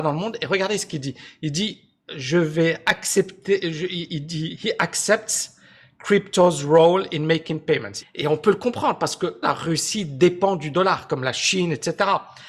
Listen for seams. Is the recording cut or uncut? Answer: cut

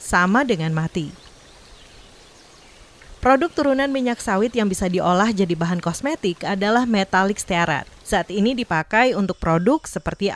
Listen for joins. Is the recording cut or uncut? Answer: cut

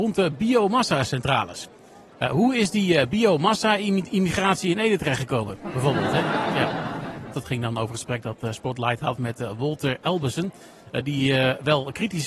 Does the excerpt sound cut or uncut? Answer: cut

